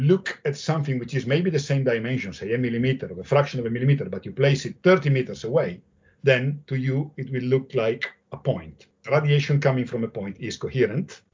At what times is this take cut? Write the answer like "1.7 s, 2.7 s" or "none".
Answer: none